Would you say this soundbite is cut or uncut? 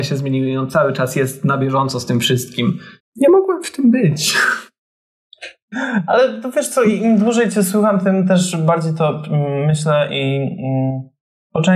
cut